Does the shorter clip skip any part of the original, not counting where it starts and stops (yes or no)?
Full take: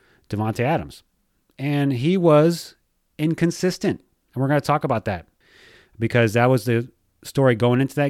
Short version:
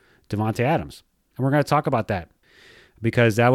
yes